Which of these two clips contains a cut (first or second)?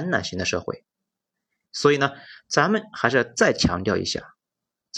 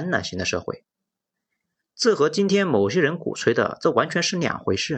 first